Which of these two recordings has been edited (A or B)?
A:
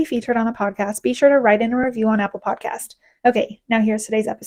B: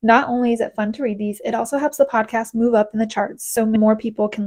A